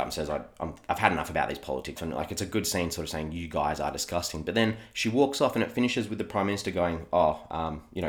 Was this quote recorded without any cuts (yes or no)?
no